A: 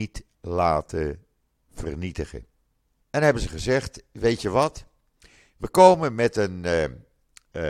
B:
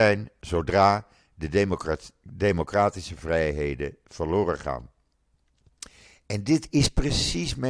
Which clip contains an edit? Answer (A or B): A